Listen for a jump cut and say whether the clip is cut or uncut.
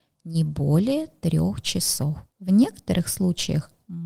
cut